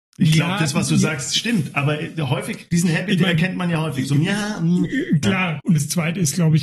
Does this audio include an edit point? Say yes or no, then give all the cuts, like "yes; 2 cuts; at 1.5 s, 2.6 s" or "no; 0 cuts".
yes; 1 cut; at 5.6 s